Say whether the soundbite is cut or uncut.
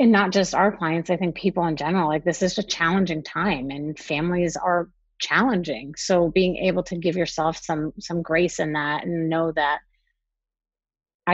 cut